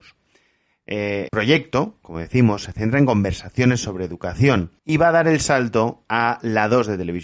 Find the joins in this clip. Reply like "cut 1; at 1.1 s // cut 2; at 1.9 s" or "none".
cut 1; at 1.3 s // cut 2; at 4.8 s